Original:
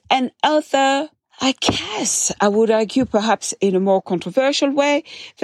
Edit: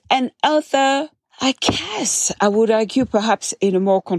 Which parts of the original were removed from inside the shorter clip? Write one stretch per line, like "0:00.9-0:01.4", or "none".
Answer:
none